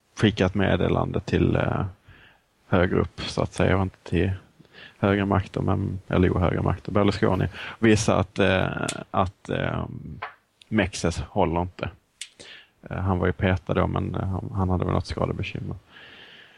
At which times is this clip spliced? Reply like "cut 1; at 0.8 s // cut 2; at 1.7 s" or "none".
none